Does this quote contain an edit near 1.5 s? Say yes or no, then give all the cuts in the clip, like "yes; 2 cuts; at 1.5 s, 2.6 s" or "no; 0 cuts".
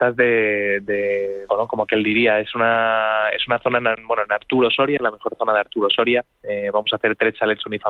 yes; 1 cut; at 1.5 s